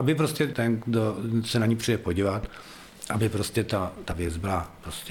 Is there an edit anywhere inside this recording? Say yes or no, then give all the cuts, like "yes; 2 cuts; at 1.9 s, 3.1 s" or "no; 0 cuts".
no; 0 cuts